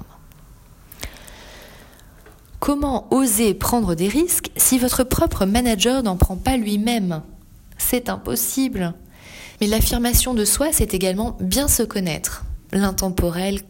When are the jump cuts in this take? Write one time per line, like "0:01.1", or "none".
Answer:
0:09.6